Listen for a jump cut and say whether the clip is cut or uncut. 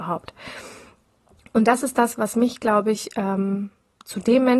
uncut